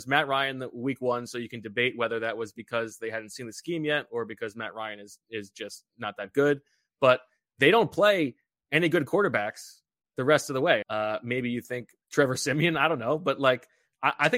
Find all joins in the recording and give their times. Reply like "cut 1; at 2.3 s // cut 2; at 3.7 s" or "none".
cut 1; at 10.8 s // cut 2; at 12.0 s